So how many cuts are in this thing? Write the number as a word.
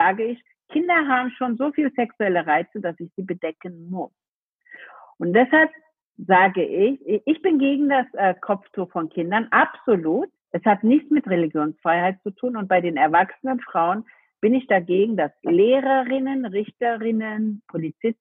one